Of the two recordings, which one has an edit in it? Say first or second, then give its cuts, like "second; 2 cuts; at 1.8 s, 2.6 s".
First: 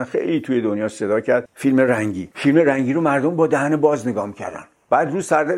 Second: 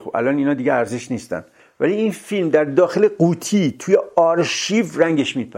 first; 1 cut; at 2.3 s